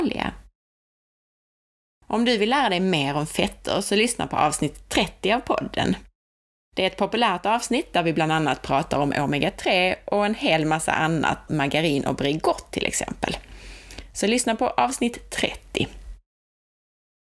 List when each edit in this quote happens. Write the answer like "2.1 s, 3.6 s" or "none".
11.5 s